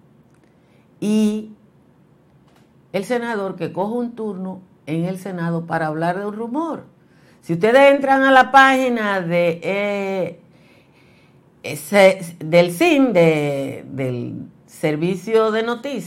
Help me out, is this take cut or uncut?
uncut